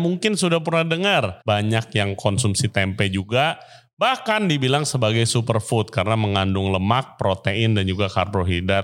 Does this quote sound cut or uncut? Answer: cut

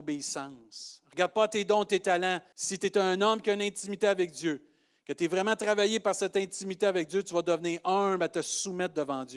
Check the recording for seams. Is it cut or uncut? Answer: cut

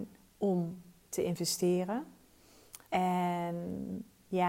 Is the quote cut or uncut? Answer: cut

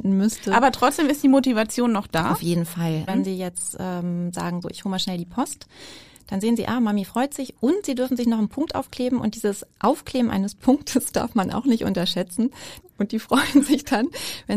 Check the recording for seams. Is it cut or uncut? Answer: cut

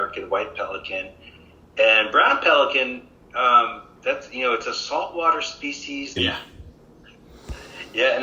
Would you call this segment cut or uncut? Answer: cut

